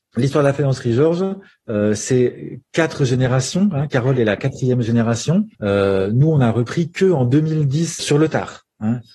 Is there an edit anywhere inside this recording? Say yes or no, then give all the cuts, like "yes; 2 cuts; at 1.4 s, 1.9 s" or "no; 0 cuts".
yes; 2 cuts; at 5.5 s, 8.0 s